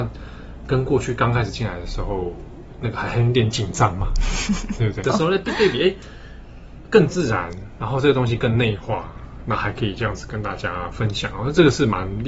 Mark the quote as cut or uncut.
cut